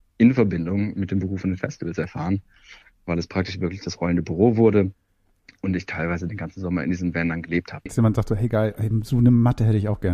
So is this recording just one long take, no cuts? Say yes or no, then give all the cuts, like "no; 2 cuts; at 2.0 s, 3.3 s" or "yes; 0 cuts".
no; 1 cut; at 7.9 s